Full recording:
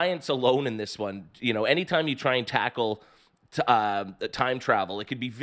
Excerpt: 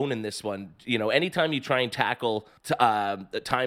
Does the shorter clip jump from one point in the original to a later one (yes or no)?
yes